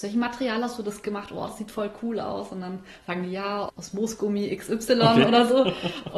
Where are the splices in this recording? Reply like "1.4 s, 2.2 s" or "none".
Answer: none